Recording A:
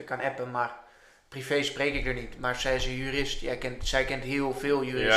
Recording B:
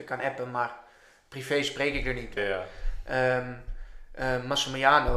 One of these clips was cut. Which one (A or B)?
B